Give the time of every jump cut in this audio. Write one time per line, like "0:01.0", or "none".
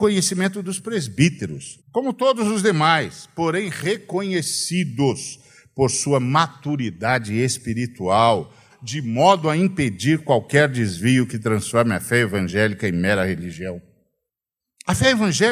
0:01.8
0:08.7